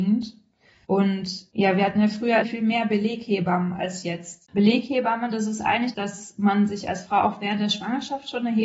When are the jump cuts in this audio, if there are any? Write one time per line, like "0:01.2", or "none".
0:04.5